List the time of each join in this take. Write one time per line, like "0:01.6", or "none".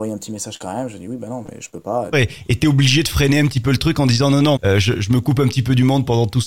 0:02.1
0:04.6